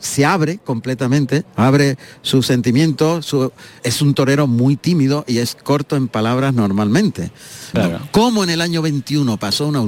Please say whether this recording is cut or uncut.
cut